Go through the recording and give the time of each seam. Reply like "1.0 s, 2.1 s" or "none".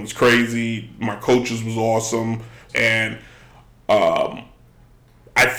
2.7 s